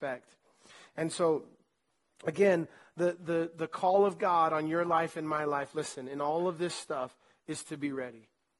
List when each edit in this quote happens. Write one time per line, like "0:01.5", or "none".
none